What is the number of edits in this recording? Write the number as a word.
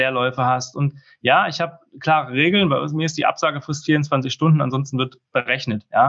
zero